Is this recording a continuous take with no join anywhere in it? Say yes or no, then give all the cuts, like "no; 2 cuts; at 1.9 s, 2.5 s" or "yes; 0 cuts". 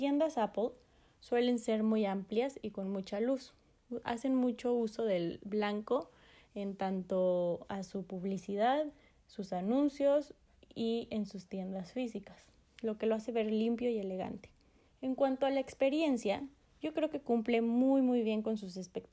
no; 1 cut; at 14.9 s